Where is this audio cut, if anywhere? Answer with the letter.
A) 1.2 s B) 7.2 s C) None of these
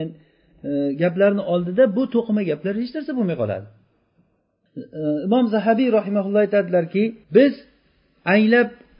B